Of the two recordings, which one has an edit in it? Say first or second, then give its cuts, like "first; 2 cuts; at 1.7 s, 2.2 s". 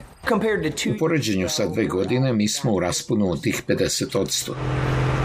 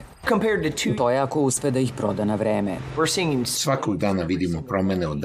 second; 1 cut; at 1.0 s